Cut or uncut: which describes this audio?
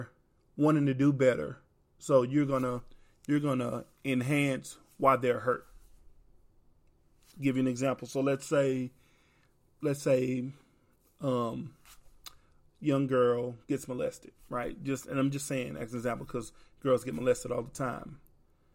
uncut